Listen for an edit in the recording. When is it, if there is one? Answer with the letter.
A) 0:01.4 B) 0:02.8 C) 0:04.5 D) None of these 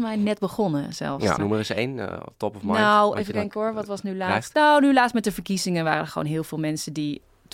A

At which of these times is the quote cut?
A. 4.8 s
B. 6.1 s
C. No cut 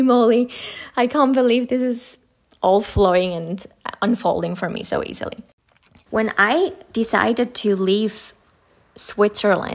B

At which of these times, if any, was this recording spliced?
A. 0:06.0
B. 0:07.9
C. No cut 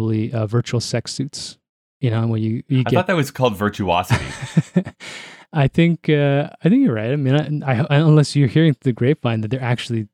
B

